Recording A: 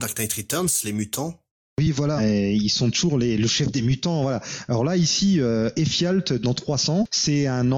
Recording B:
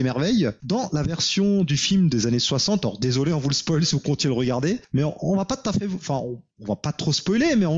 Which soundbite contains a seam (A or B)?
A